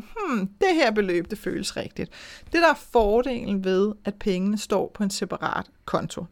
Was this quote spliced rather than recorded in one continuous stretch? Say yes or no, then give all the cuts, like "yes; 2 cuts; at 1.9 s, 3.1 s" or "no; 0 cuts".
no; 0 cuts